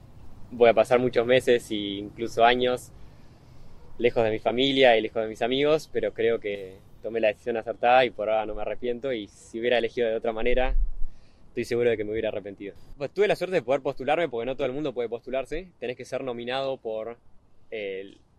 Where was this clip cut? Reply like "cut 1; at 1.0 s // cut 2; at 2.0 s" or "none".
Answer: none

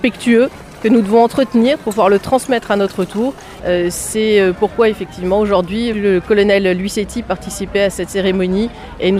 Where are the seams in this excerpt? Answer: cut 1; at 3.6 s

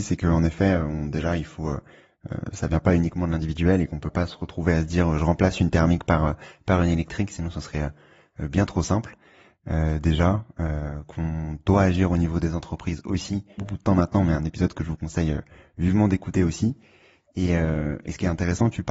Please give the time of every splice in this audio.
cut 1; at 13.6 s

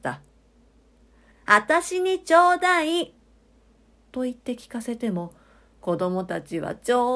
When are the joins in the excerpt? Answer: cut 1; at 1.3 s // cut 2; at 4.0 s

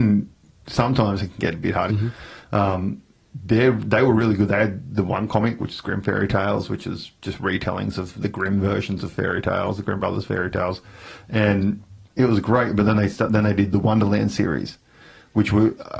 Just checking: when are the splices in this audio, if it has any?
cut 1; at 1.9 s

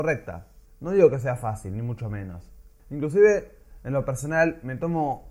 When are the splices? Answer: cut 1; at 2.8 s

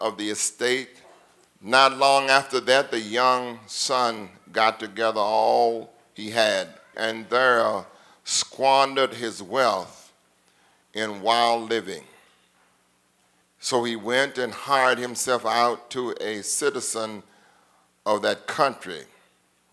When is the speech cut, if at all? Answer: cut 1; at 1.5 s // cut 2; at 6.9 s // cut 3; at 13.4 s

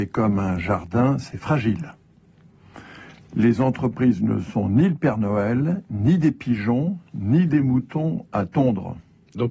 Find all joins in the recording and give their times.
none

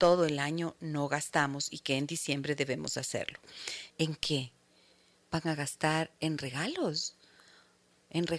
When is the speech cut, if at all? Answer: cut 1; at 3.9 s

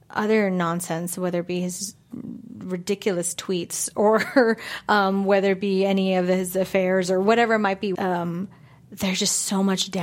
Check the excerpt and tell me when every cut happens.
cut 1; at 8.0 s

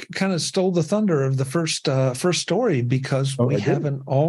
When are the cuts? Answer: none

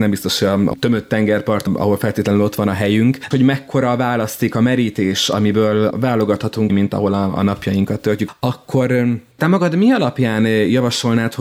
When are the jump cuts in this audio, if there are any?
cut 1; at 3.3 s // cut 2; at 6.7 s

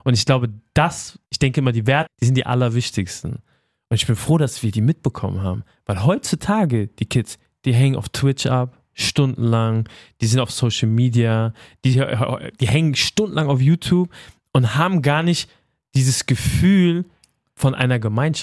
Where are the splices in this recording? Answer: cut 1; at 2.1 s

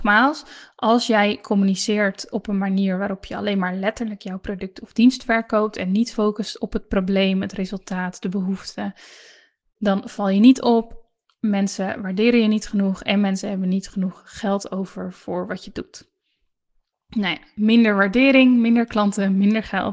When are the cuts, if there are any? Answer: none

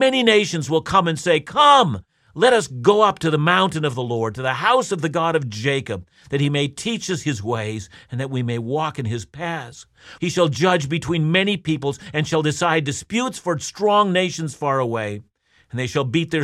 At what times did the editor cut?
cut 1; at 10.2 s

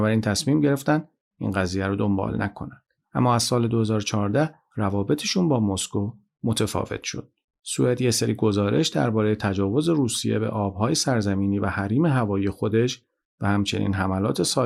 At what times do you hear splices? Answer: none

